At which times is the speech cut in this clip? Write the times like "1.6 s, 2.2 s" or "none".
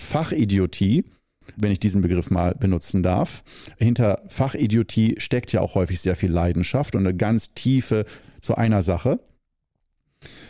1.6 s, 3.8 s, 8.2 s